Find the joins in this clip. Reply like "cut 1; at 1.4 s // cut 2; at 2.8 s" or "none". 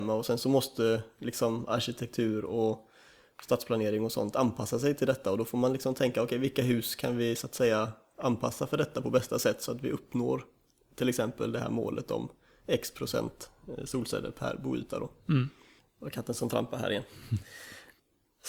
cut 1; at 15.8 s